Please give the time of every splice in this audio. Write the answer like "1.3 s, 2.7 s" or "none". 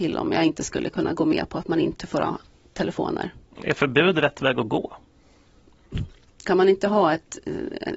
6.4 s